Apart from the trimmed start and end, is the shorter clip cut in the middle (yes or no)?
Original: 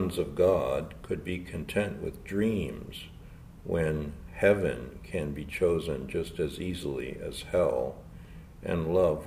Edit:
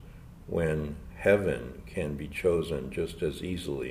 no